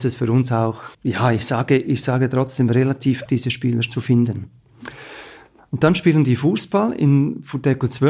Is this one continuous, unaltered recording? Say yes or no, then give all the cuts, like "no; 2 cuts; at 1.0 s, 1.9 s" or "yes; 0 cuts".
no; 2 cuts; at 0.9 s, 3.3 s